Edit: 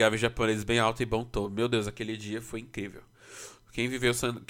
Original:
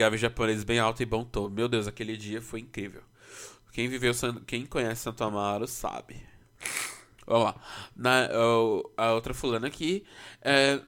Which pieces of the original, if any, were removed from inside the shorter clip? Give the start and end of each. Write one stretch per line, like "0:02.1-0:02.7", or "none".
none